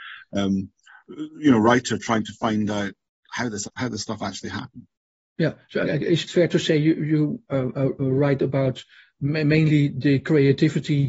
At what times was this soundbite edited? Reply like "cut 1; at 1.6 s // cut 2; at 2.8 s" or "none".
cut 1; at 3.6 s // cut 2; at 5.8 s